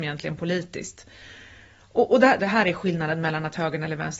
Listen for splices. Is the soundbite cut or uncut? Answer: cut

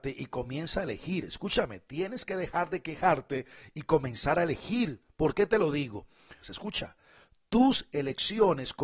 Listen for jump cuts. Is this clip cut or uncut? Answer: cut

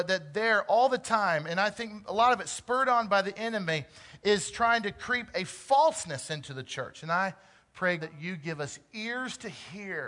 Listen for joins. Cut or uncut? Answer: cut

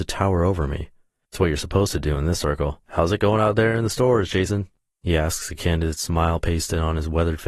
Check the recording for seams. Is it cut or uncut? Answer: cut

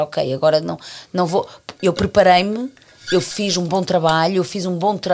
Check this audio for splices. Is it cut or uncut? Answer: uncut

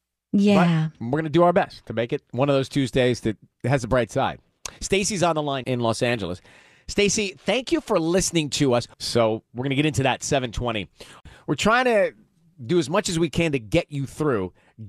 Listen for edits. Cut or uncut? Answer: cut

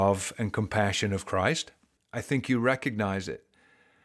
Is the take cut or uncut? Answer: cut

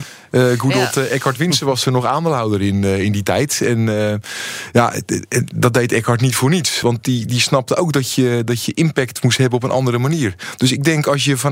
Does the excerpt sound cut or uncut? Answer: uncut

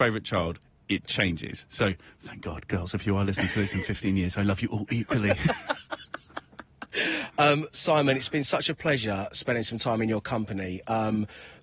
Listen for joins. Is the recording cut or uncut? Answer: uncut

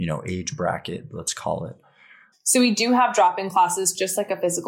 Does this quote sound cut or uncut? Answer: cut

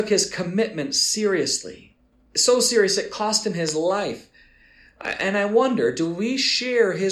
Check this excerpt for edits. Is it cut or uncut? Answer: cut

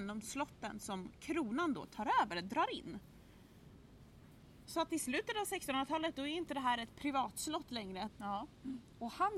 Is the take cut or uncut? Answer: cut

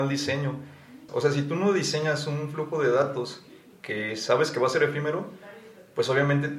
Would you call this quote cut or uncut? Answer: cut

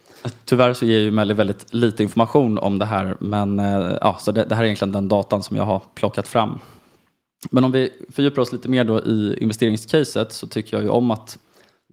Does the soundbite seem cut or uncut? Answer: uncut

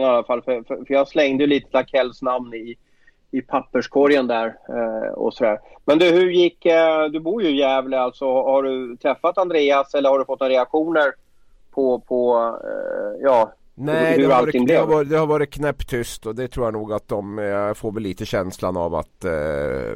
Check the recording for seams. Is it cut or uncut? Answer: uncut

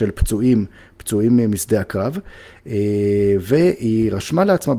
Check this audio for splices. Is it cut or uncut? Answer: uncut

